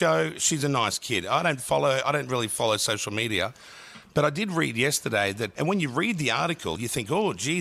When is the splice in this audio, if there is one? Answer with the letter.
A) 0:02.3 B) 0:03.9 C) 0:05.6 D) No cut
C